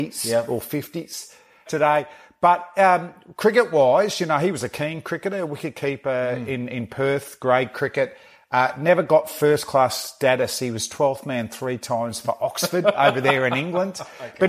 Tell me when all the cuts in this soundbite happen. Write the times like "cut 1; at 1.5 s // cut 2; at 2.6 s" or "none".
cut 1; at 1.7 s